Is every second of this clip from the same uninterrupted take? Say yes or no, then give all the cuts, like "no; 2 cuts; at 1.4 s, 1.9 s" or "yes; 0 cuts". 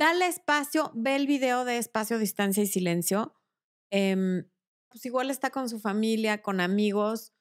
no; 1 cut; at 4.9 s